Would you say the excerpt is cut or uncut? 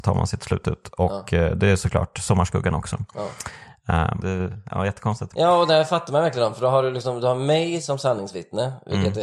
cut